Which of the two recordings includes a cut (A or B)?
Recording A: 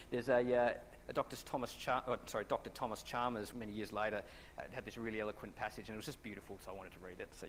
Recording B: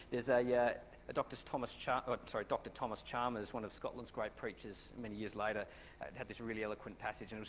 A